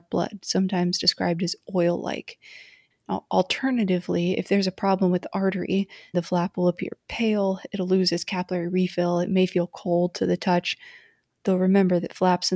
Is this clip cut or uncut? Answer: cut